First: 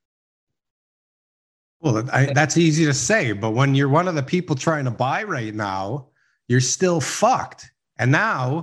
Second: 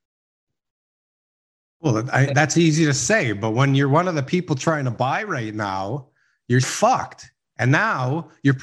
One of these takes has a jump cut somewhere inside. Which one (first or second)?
second